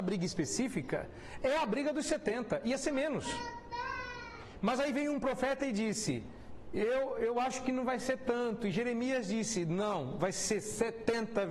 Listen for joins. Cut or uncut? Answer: uncut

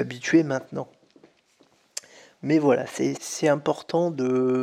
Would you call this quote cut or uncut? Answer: cut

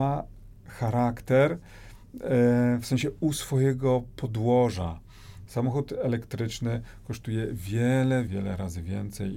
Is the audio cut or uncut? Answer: cut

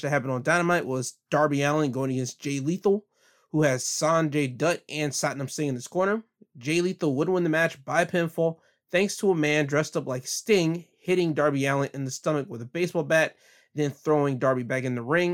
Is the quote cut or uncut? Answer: uncut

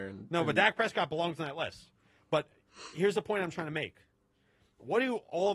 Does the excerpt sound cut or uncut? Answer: uncut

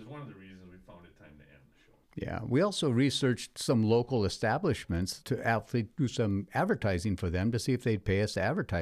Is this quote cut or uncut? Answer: cut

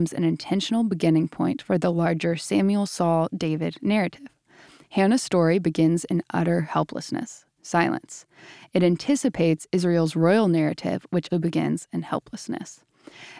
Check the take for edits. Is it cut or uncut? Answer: cut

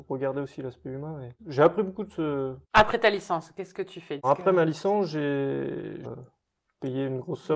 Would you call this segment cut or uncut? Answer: cut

